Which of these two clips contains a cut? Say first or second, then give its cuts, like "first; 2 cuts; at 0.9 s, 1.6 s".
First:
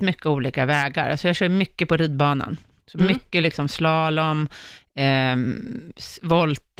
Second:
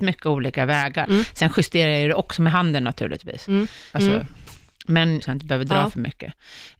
second; 3 cuts; at 1.1 s, 3.9 s, 5.2 s